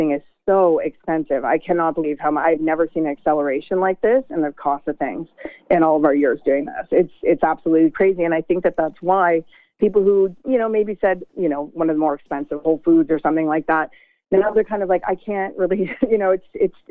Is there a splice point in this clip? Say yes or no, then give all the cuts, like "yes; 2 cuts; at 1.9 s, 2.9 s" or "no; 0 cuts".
yes; 1 cut; at 11.3 s